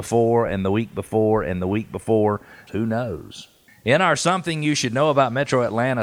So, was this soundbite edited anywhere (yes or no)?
yes